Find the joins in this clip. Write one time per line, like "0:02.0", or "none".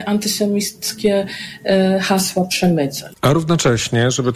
0:03.1